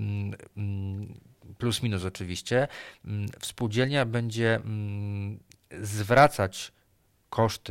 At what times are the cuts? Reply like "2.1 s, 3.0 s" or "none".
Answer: none